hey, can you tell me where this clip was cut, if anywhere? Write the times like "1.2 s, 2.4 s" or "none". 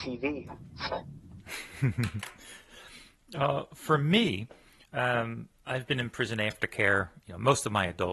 none